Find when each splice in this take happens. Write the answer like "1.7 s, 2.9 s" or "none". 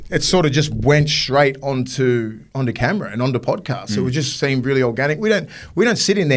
2.5 s